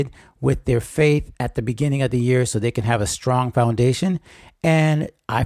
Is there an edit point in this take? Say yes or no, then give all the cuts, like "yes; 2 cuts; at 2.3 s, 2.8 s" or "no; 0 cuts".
no; 0 cuts